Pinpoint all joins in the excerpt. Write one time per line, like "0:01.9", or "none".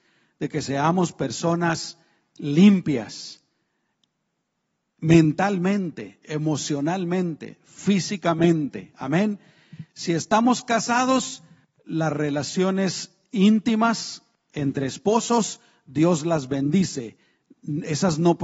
none